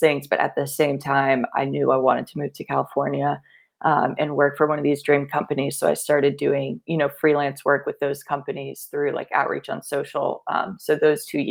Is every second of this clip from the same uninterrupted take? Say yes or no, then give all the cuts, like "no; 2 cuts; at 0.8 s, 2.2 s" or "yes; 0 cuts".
yes; 0 cuts